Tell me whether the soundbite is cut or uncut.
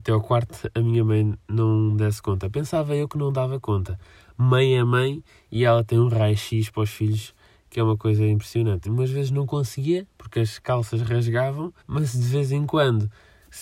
cut